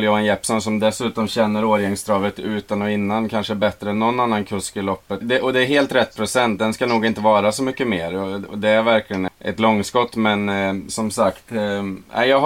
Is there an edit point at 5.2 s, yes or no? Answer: yes